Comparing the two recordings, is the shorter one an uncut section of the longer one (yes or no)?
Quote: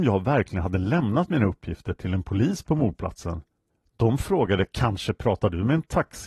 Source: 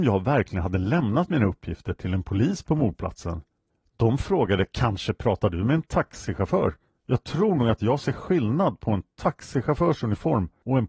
yes